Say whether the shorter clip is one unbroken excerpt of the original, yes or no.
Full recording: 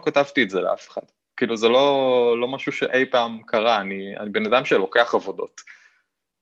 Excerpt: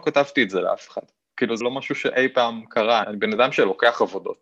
no